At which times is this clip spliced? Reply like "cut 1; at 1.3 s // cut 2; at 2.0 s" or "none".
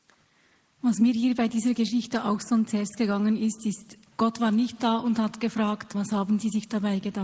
cut 1; at 5.9 s